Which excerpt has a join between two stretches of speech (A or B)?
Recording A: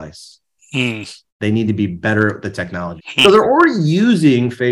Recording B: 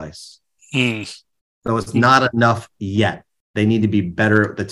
A